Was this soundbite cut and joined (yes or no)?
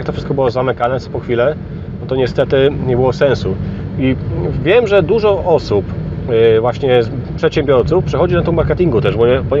no